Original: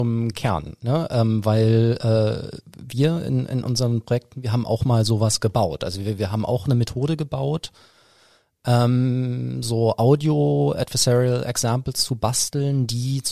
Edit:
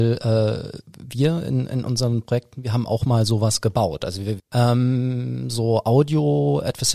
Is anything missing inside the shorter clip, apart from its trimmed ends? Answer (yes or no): yes